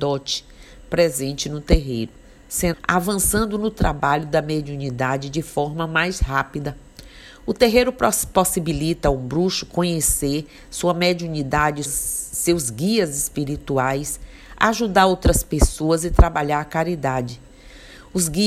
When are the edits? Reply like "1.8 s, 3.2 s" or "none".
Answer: 2.7 s, 11.9 s